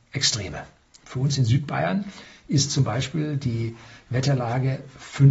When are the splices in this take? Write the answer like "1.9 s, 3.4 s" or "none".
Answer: 1.0 s

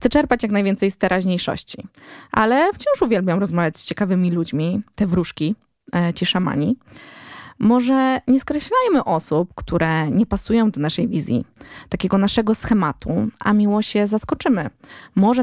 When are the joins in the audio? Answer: 5.0 s

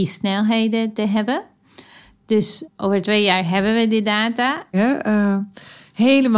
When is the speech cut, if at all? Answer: 2.6 s, 4.7 s

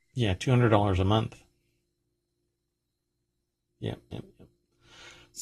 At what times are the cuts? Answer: 3.7 s

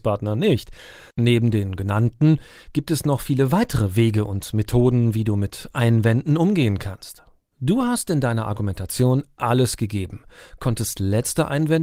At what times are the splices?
1.1 s, 7.5 s

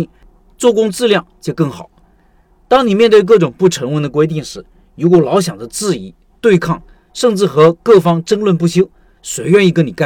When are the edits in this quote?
none

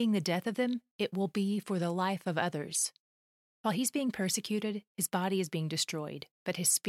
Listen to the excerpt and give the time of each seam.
none

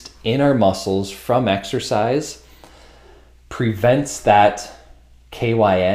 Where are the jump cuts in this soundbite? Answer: none

